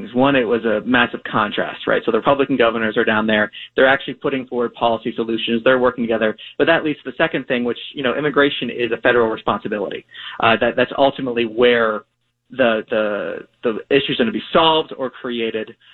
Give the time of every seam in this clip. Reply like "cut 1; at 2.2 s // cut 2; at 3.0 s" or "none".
cut 1; at 6.6 s